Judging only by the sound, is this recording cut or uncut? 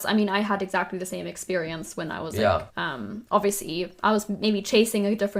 cut